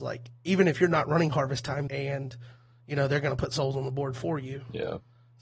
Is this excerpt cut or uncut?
cut